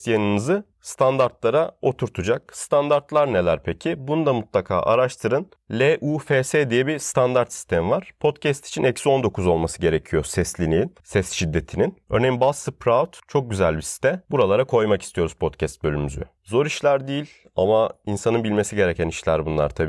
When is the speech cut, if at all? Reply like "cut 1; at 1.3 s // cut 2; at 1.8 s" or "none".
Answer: cut 1; at 12.1 s // cut 2; at 14.2 s